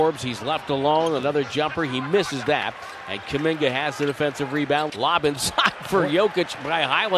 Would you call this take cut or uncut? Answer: cut